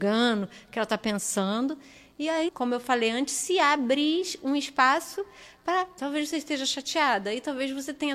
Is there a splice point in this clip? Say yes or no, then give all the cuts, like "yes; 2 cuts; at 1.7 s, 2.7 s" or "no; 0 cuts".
yes; 2 cuts; at 2.5 s, 6.0 s